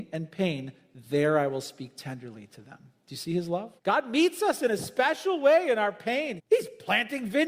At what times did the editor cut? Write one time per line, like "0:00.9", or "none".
0:03.8
0:06.4